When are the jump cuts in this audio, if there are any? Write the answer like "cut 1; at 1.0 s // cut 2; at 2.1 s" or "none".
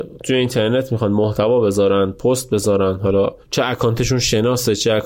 cut 1; at 3.4 s